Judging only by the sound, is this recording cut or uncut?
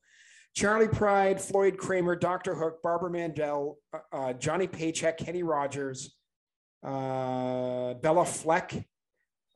uncut